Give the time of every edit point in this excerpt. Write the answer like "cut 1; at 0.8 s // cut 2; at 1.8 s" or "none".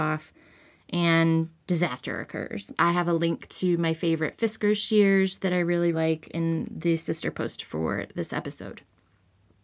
cut 1; at 2.7 s // cut 2; at 5.9 s